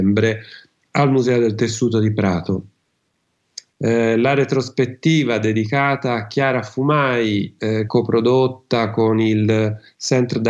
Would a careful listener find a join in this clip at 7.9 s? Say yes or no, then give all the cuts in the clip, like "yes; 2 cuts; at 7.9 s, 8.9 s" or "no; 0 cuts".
yes; 2 cuts; at 3.7 s, 7.9 s